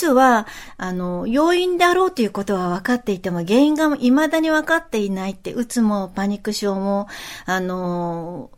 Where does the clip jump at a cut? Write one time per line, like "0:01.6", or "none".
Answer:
none